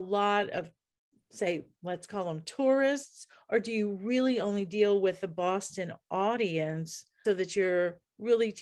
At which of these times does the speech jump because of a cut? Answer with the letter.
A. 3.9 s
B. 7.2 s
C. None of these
B